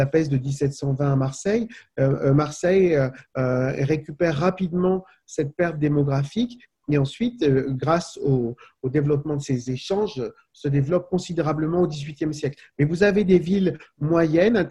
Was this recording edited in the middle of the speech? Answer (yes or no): no